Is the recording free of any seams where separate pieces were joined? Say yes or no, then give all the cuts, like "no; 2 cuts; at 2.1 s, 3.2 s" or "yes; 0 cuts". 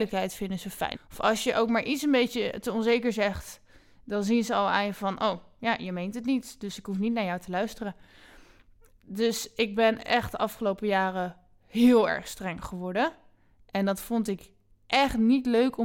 no; 1 cut; at 0.9 s